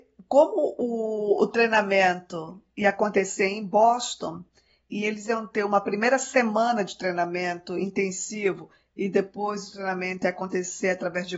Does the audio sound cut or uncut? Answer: uncut